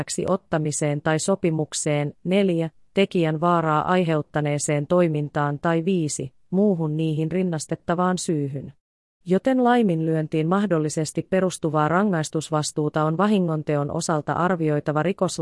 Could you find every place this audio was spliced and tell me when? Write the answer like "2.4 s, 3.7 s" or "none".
9.2 s